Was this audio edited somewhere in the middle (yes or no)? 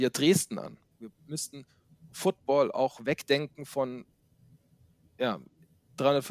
yes